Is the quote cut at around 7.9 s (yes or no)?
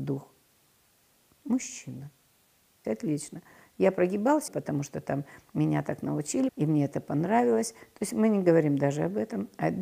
no